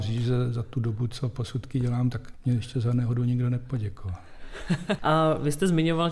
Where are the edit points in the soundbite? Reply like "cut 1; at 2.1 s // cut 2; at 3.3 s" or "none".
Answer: cut 1; at 5.0 s